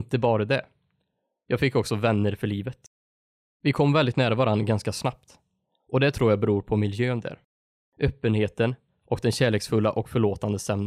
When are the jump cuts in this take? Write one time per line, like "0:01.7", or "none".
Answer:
0:03.5